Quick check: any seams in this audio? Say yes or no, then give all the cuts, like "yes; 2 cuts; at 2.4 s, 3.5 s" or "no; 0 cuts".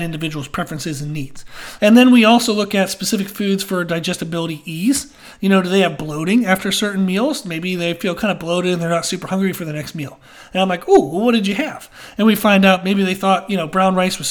yes; 1 cut; at 1.8 s